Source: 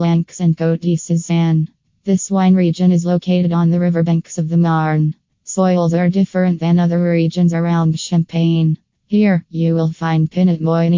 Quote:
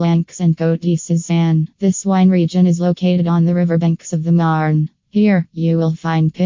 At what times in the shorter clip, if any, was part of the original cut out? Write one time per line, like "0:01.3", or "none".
0:01.7
0:05.0